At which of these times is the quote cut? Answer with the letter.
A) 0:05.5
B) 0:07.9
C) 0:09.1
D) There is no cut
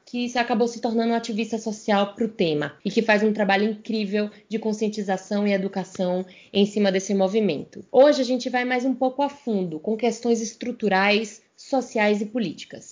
D